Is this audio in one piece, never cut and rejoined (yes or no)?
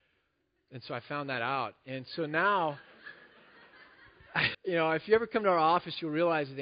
no